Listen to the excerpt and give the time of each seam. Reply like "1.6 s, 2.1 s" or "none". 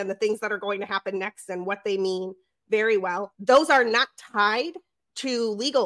3.3 s